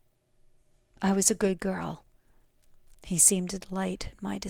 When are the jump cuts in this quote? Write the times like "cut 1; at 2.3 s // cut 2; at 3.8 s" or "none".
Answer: cut 1; at 2.9 s